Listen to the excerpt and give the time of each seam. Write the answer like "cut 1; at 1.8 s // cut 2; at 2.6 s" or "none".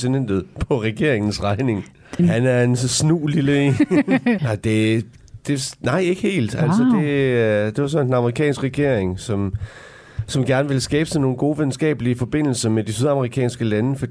cut 1; at 2.2 s // cut 2; at 4.4 s